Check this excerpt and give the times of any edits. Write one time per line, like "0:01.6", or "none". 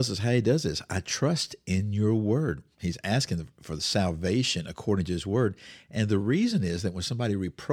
0:02.8